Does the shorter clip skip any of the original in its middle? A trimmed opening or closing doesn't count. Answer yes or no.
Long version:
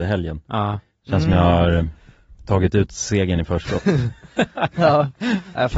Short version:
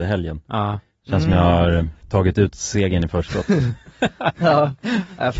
yes